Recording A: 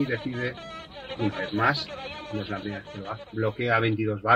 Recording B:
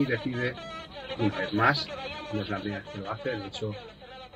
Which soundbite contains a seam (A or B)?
A